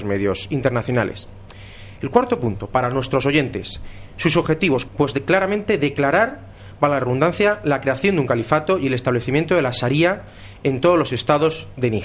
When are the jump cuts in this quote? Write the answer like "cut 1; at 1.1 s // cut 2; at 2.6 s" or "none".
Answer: cut 1; at 4.9 s